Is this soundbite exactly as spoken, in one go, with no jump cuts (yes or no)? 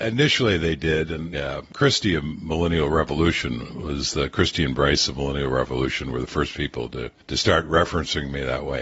no